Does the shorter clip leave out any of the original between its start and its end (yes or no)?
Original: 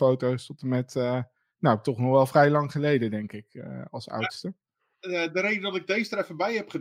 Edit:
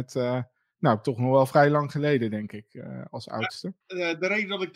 yes